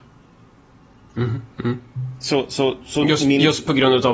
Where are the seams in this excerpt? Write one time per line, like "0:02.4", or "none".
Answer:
none